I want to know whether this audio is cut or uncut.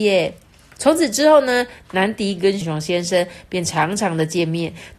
cut